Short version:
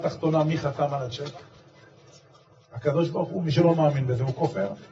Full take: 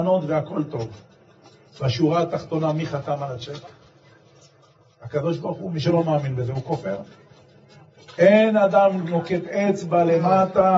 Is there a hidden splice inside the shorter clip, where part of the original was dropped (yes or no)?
no